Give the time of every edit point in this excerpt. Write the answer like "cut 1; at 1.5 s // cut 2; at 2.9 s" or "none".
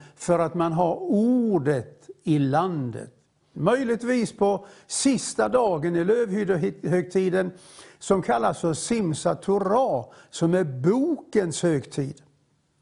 cut 1; at 3.5 s